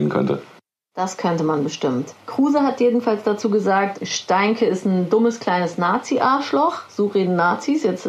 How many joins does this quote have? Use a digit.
2